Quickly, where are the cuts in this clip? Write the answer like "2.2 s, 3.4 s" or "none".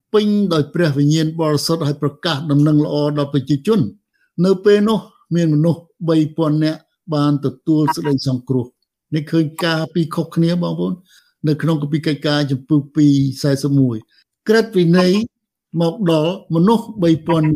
none